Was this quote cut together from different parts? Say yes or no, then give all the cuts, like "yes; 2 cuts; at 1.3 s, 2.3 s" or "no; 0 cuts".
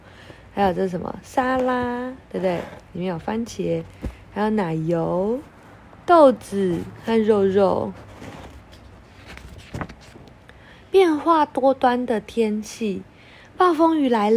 no; 0 cuts